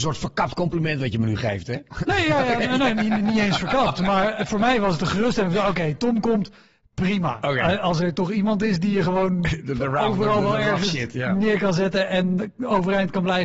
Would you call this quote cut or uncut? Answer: uncut